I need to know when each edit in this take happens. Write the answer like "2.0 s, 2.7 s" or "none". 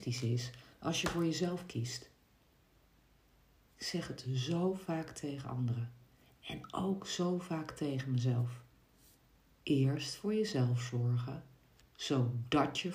none